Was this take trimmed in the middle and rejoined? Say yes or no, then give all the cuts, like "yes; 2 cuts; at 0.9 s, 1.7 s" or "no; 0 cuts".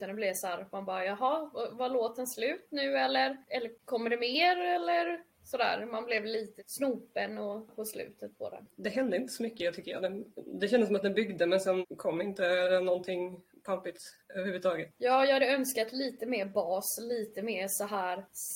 no; 0 cuts